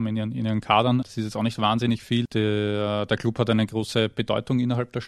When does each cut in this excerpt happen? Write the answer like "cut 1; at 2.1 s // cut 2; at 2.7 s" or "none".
cut 1; at 1.0 s // cut 2; at 2.3 s

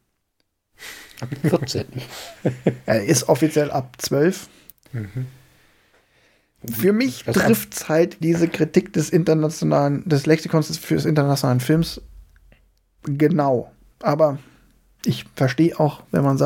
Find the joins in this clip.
cut 1; at 4.7 s // cut 2; at 8.2 s // cut 3; at 13.9 s

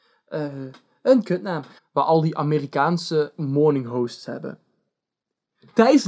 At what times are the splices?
cut 1; at 1.8 s

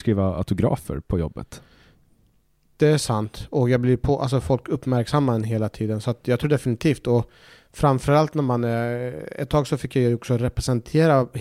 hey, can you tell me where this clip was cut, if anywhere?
none

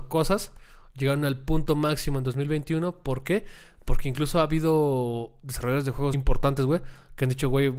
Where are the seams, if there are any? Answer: cut 1; at 6.1 s

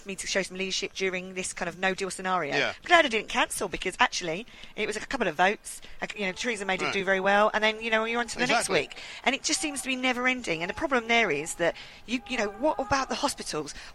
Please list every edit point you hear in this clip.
none

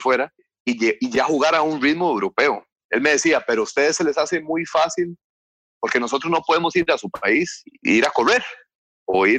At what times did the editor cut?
cut 1; at 2.7 s

